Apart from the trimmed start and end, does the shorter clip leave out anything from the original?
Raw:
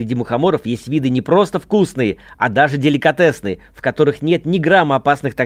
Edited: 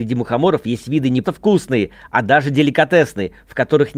yes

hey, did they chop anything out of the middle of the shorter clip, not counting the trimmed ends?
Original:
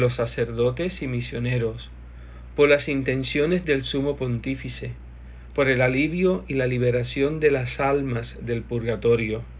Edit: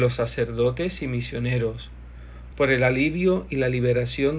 yes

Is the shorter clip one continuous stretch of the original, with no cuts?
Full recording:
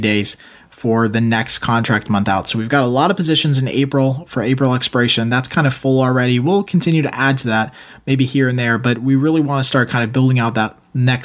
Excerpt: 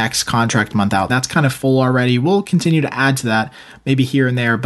no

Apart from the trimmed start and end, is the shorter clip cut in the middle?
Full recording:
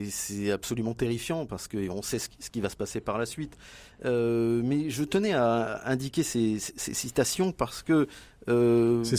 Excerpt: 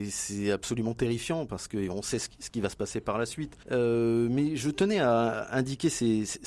yes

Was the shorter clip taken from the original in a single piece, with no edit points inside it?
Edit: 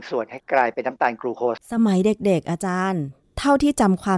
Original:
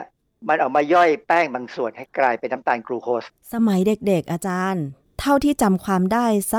no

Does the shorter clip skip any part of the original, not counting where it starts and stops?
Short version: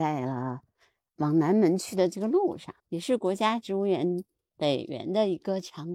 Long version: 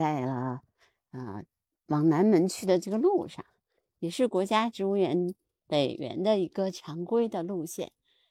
yes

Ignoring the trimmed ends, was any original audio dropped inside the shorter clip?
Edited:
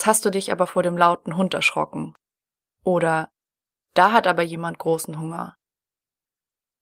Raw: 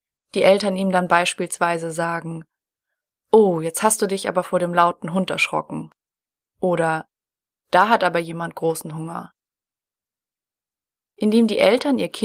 no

